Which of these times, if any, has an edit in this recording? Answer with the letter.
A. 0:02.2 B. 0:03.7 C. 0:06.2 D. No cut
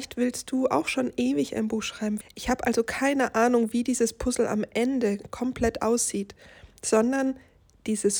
A